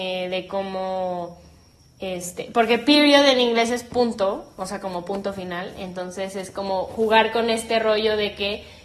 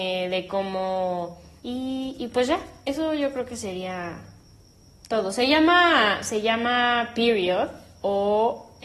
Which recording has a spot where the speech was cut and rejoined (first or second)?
second